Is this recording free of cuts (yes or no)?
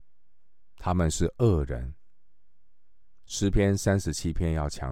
no